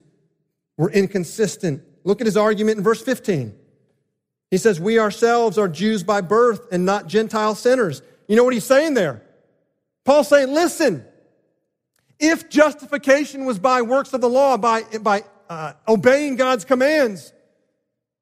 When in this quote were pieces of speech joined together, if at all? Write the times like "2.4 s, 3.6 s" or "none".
none